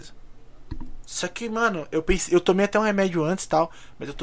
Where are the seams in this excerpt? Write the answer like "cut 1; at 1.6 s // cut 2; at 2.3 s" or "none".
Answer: cut 1; at 1.0 s